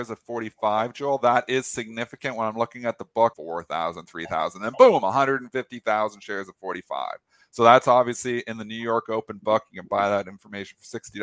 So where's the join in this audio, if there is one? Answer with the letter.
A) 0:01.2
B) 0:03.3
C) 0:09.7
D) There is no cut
B